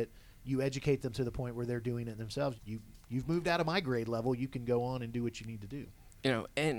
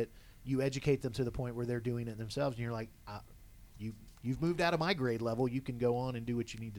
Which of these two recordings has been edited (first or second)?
first